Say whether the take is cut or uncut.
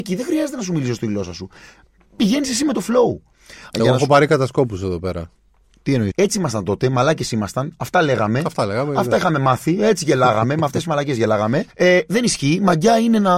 cut